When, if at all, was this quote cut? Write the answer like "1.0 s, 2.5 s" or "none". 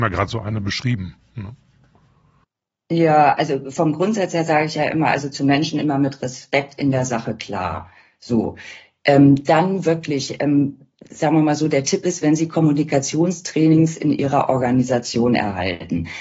none

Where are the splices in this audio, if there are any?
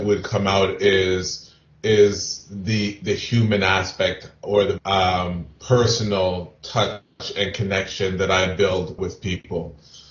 4.8 s, 9.0 s

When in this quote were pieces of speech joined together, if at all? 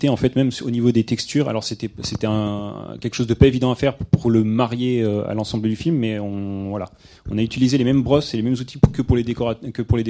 none

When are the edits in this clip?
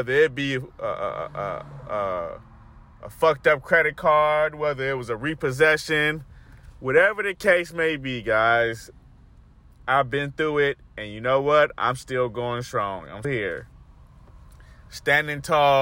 13.2 s

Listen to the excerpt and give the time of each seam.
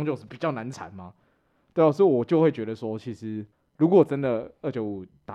none

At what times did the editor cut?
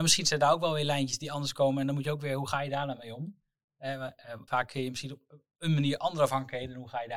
4.5 s

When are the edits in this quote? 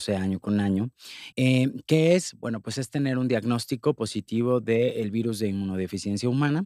1.3 s

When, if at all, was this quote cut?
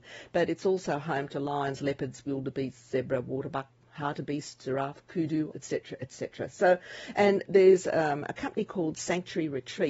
5.5 s

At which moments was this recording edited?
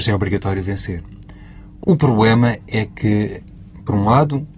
1.8 s

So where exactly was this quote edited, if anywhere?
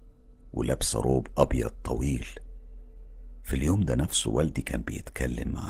none

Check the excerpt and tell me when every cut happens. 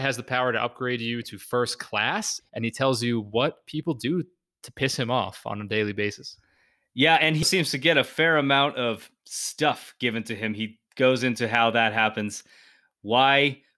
2.4 s, 7.4 s

